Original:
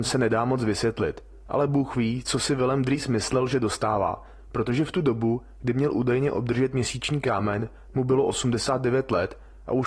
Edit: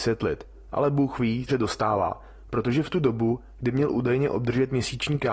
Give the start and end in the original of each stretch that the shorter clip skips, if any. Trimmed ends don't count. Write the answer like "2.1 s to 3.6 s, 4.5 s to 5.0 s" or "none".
2.2 s to 3.5 s